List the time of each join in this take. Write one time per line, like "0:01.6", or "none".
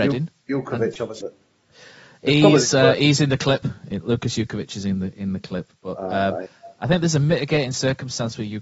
0:01.2